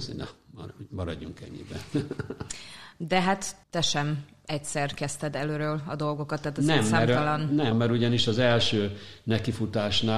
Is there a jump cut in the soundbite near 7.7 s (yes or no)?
yes